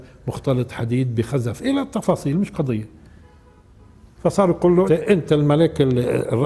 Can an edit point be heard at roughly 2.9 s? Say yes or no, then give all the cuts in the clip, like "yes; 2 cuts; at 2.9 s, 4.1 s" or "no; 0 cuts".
no; 1 cut; at 4.9 s